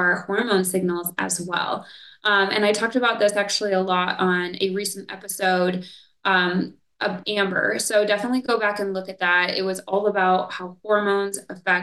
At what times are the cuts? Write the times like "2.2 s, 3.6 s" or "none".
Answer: 7.2 s